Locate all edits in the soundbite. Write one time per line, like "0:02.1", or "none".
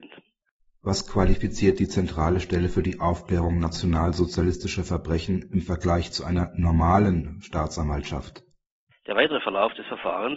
0:08.9